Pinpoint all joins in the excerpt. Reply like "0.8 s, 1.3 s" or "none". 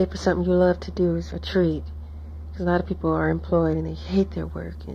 1.3 s